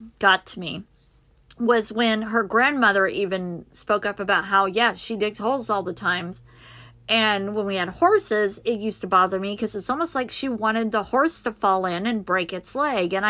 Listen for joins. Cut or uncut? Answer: uncut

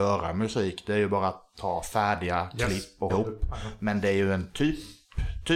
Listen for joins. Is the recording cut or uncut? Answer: cut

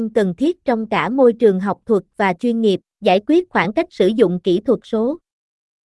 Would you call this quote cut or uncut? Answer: cut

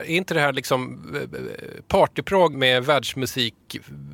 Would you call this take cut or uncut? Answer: cut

